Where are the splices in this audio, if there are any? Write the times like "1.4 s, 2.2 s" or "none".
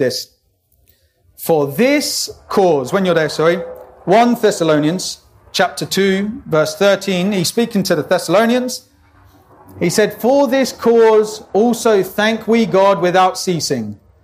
none